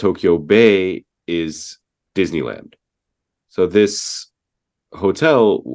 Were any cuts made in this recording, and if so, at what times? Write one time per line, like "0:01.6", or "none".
0:03.4